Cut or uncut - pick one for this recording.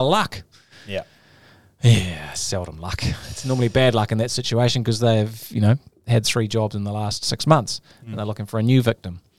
uncut